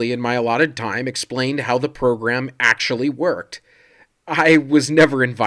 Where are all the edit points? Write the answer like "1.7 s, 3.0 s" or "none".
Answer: none